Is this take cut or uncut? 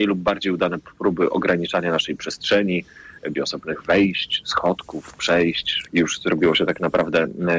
cut